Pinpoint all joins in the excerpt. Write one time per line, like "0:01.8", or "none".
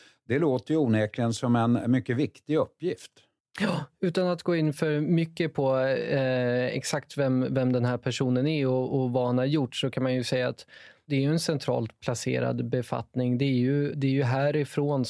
0:13.9